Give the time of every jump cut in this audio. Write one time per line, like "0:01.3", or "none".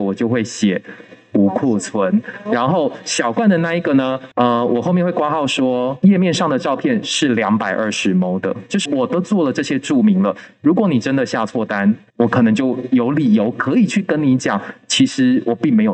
0:08.9